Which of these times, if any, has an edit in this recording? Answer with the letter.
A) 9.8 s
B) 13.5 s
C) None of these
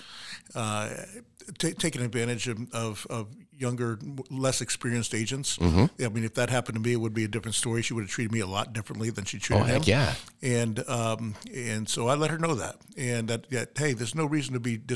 C